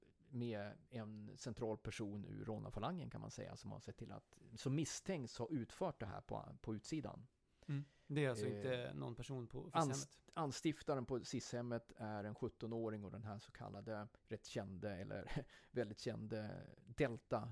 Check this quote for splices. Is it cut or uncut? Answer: cut